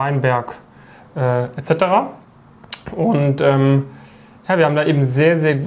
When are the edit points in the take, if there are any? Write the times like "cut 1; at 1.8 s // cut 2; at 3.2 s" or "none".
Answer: none